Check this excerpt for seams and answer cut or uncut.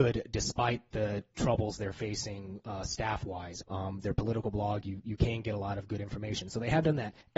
cut